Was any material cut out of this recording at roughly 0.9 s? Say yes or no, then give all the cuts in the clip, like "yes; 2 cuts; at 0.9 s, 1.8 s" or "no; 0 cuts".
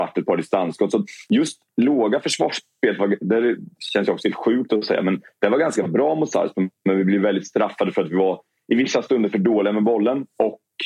no; 0 cuts